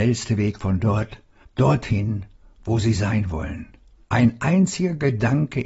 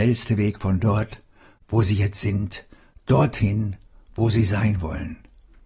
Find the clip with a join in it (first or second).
first